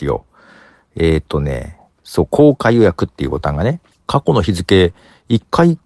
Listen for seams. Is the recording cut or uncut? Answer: cut